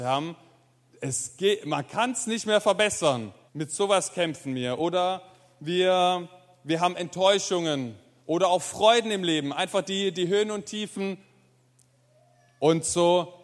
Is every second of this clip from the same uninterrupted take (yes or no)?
no